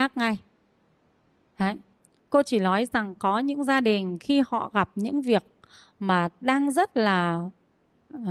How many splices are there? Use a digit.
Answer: 0